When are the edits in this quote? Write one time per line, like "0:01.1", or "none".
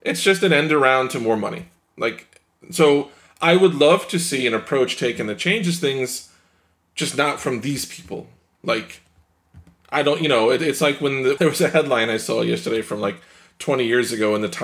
0:11.4